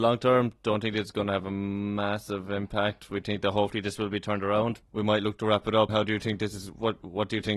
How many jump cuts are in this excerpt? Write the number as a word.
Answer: two